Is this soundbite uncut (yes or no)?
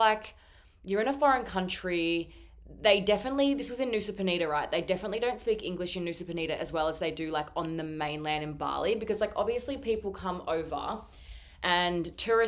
yes